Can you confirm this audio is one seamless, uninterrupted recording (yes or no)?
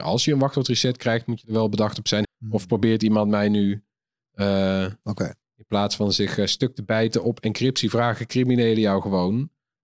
no